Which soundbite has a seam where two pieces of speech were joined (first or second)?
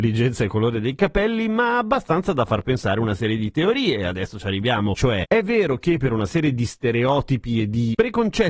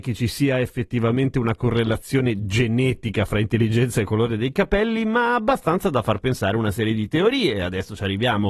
first